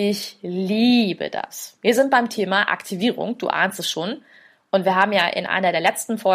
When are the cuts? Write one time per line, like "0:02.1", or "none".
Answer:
none